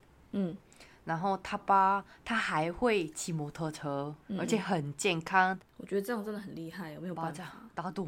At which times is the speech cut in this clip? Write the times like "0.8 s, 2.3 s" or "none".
1.6 s, 4.2 s, 5.6 s